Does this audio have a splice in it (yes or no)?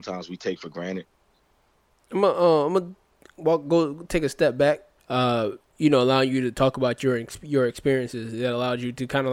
yes